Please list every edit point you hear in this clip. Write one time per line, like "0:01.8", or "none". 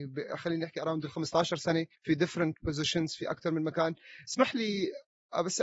0:01.9